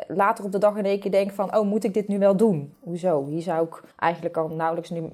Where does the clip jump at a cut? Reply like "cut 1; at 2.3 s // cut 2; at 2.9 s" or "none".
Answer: cut 1; at 2.7 s // cut 2; at 3.9 s